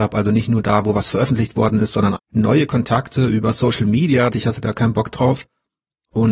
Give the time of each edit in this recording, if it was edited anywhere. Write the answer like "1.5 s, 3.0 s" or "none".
2.1 s, 4.3 s

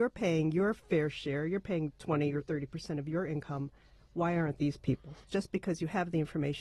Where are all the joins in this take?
5.3 s

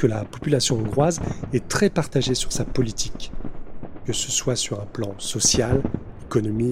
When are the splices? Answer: none

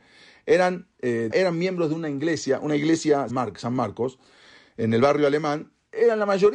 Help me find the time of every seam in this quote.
1.3 s, 3.3 s

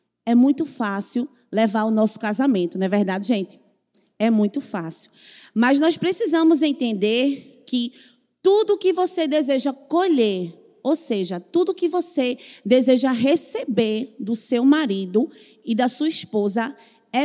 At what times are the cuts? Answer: none

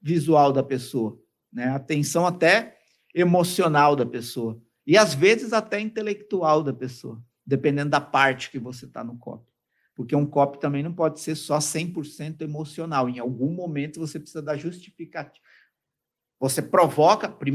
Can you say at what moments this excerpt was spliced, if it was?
none

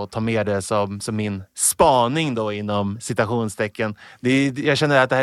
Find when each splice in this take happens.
none

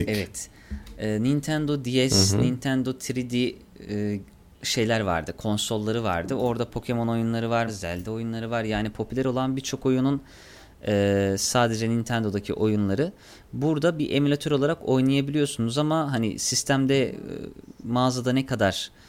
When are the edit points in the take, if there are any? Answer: 7.7 s

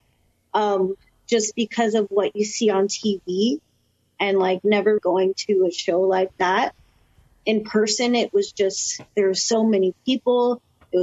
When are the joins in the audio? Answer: 5.0 s, 9.1 s

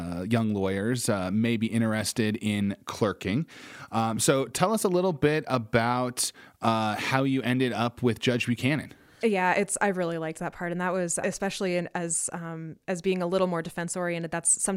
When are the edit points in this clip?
9.2 s, 11.2 s

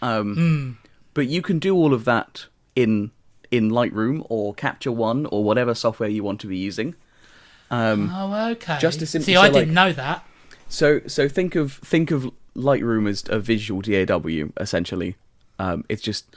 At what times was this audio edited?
none

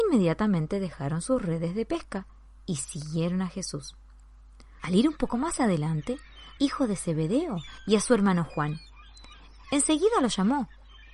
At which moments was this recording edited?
4.8 s, 6.6 s, 9.6 s

